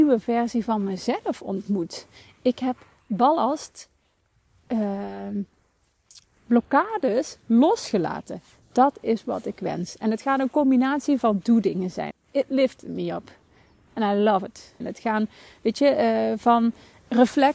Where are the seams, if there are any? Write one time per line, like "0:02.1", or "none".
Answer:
0:12.1
0:14.8